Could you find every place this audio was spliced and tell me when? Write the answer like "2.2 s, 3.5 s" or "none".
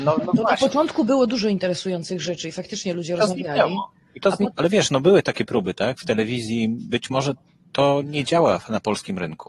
4.5 s